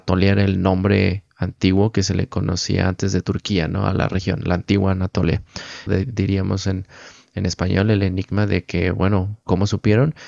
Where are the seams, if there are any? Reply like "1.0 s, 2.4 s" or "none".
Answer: 5.9 s